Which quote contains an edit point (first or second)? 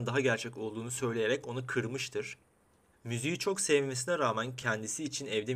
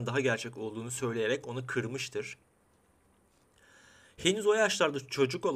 first